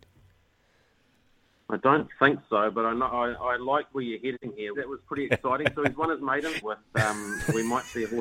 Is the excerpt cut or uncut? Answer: cut